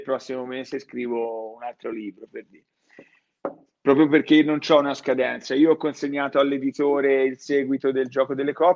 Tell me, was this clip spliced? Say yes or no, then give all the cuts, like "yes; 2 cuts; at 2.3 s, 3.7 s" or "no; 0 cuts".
no; 0 cuts